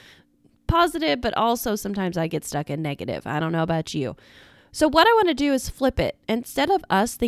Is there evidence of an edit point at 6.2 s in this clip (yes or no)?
no